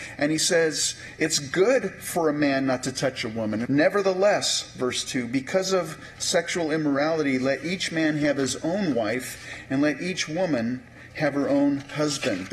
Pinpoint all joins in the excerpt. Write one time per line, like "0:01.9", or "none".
0:03.6